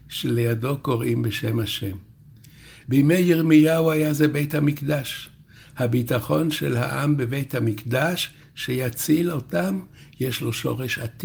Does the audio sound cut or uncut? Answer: uncut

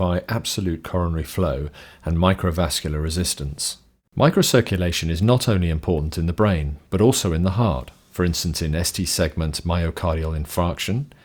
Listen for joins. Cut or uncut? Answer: cut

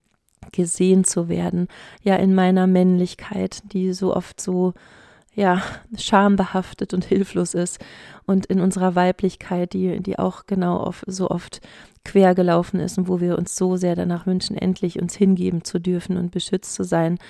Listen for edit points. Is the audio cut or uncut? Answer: uncut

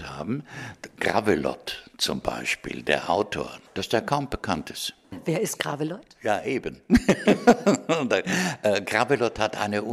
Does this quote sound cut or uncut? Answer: uncut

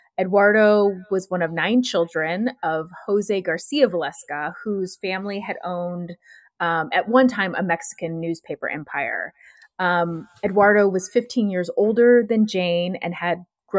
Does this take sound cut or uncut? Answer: uncut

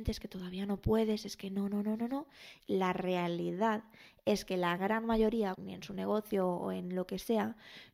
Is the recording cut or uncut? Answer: cut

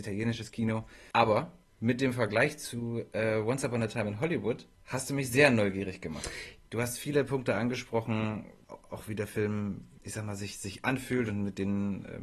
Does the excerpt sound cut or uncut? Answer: cut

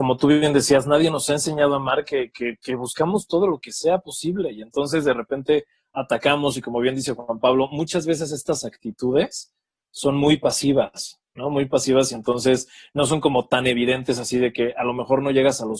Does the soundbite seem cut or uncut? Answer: uncut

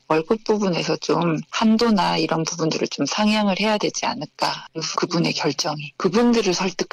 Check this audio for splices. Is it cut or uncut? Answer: cut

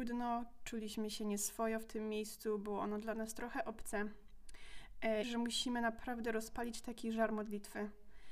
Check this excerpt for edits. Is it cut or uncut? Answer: cut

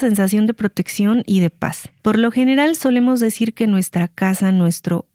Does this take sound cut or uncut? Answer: cut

